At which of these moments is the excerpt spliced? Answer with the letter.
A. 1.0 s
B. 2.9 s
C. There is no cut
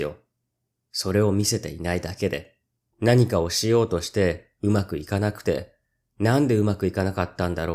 B